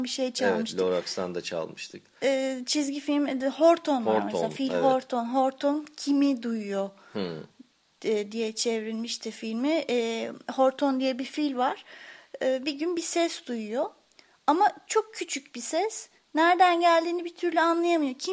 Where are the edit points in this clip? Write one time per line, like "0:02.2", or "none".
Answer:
none